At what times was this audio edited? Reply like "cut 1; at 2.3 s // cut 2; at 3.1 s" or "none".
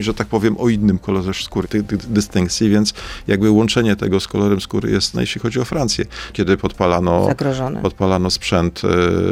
cut 1; at 1.6 s // cut 2; at 5.1 s // cut 3; at 6.3 s